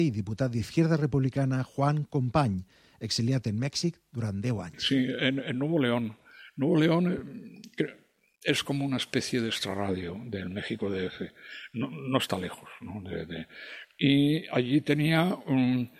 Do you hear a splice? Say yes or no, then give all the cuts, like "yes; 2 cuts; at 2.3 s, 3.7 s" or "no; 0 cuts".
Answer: no; 0 cuts